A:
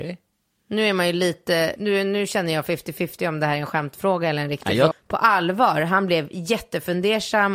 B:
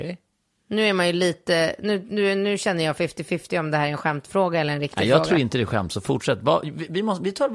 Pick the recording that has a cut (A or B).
A